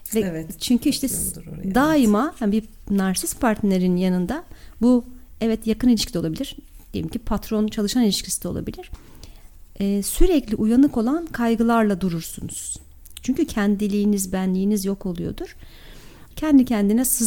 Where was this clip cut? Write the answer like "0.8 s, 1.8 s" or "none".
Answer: 16.3 s